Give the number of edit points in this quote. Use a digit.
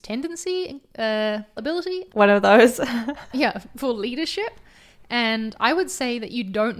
1